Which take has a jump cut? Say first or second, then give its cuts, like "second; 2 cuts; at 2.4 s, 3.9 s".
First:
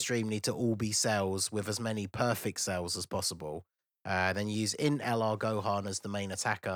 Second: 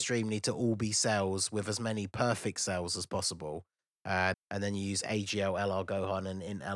second; 1 cut; at 4.3 s